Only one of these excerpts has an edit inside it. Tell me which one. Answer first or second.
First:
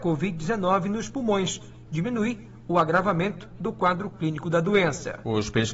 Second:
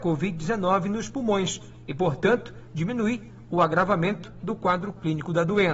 first